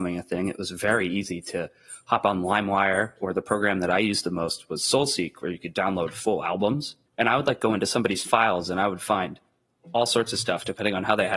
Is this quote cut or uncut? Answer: cut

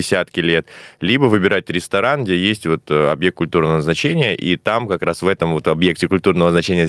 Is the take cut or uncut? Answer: uncut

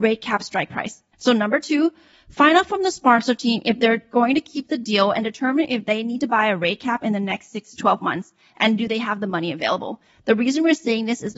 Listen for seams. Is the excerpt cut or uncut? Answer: cut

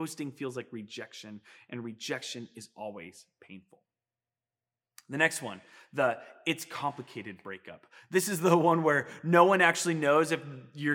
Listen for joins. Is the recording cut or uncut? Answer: uncut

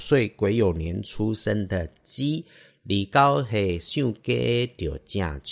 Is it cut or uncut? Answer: uncut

